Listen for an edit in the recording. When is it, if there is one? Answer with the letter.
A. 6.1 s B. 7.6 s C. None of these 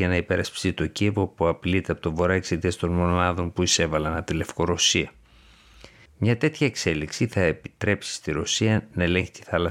A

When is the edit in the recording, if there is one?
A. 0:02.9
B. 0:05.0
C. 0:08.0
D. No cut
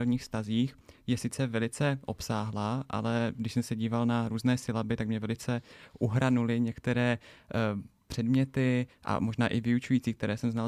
D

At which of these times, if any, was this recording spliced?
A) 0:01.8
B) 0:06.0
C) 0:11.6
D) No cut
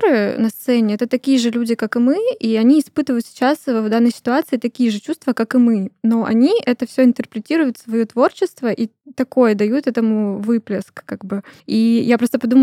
C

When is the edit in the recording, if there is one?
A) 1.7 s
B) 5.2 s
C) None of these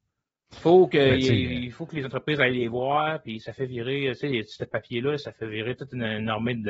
C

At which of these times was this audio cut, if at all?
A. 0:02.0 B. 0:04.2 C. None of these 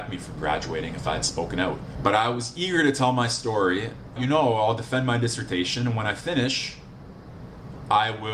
B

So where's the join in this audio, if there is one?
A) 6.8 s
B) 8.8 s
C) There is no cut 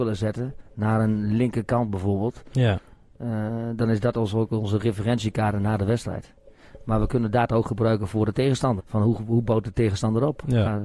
B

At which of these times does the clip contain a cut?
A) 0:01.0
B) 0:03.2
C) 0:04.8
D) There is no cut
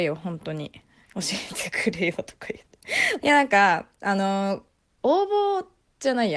B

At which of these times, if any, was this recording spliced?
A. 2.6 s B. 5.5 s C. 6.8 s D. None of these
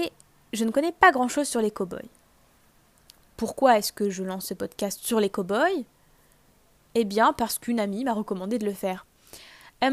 D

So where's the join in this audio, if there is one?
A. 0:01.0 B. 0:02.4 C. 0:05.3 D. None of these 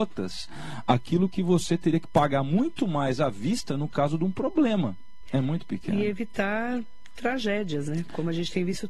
C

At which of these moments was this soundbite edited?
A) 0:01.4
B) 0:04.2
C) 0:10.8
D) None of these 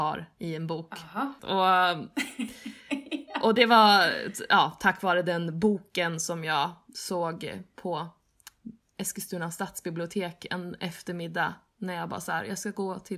A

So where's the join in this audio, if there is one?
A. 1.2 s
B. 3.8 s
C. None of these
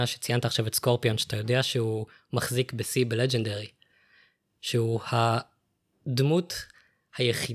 C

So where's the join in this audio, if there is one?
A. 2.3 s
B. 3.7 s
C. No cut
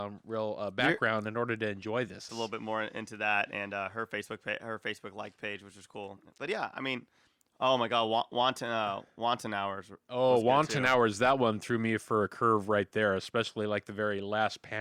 A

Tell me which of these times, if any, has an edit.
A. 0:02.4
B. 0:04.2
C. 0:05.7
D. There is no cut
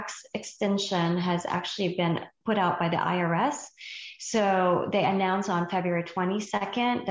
A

